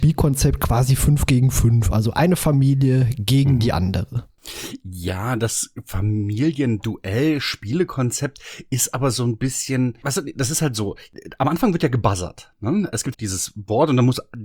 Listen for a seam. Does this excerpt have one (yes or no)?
yes